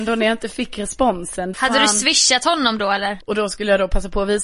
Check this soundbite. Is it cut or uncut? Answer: cut